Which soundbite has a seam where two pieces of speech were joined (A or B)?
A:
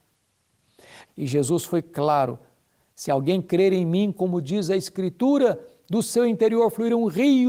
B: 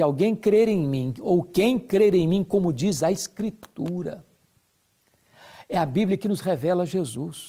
A